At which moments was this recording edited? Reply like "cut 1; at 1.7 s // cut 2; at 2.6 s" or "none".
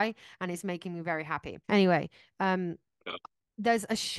cut 1; at 1.6 s